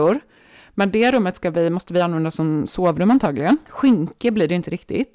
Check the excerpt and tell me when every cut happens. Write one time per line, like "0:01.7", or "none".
0:03.7